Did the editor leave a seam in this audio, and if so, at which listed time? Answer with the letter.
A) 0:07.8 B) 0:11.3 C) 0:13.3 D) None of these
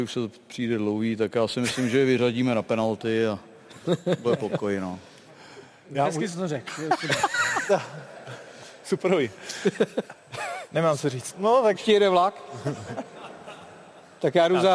B